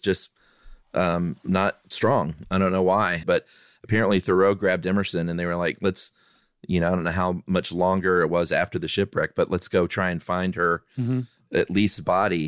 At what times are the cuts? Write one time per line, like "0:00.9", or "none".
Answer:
0:03.2